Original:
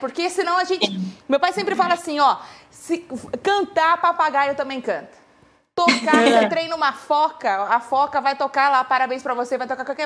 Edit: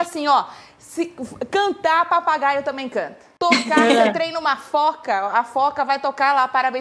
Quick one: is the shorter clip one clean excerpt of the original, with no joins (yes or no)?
no